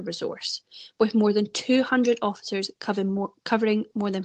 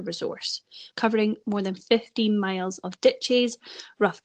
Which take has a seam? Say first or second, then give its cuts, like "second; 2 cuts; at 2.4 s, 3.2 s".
second; 1 cut; at 0.9 s